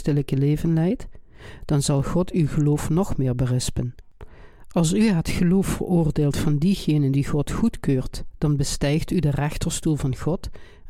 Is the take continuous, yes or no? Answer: no